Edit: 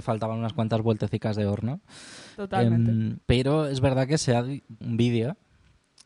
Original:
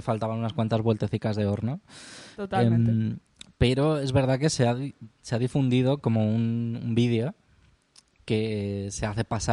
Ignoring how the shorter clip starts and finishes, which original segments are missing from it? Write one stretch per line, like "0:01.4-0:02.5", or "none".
0:03.2-0:03.5
0:05.1-0:06.8